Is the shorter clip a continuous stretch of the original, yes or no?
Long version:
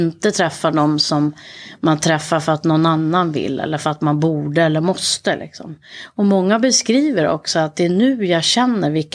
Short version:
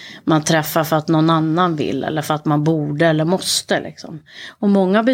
yes